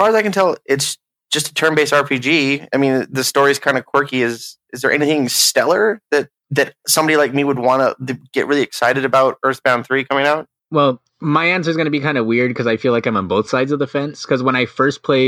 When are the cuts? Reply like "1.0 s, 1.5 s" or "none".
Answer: none